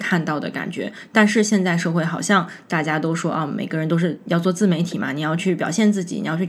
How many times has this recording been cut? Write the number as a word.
zero